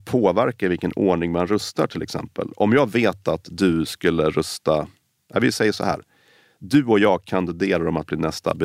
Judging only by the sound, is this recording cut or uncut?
uncut